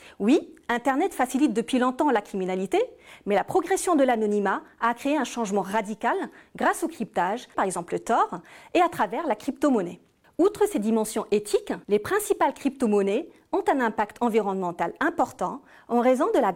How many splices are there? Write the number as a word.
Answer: three